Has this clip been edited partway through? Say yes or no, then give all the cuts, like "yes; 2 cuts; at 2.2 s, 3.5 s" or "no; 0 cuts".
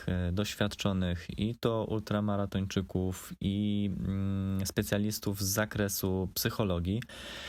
no; 0 cuts